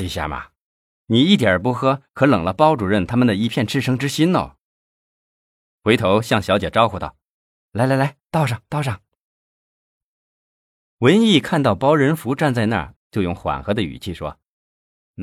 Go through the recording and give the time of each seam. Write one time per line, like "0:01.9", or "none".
0:13.0